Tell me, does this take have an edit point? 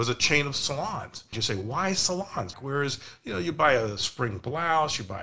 yes; 2 cuts; at 1.3 s, 2.5 s

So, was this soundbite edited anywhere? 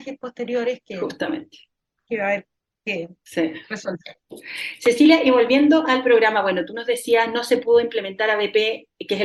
no; 0 cuts

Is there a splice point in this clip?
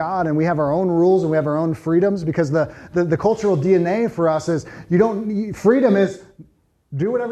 no; 0 cuts

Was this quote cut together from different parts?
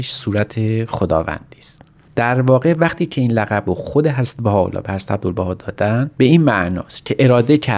yes; 1 cut; at 6.1 s

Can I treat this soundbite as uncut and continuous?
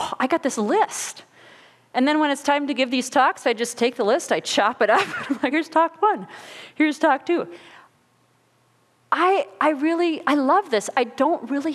no; 1 cut; at 5.5 s

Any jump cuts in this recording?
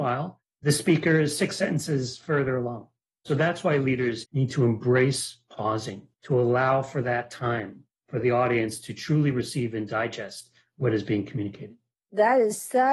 yes; 2 cuts; at 4.2 s, 6.1 s

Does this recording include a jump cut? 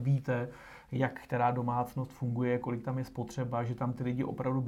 no; 0 cuts

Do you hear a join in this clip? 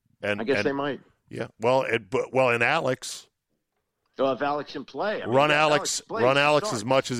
no; 0 cuts

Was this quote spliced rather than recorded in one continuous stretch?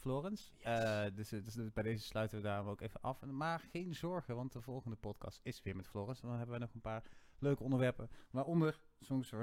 no; 0 cuts

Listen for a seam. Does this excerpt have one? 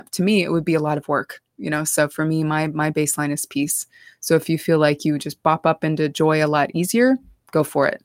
no; 0 cuts

